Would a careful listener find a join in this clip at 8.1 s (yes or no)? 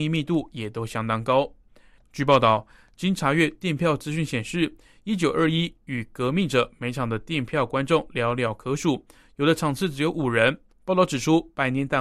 no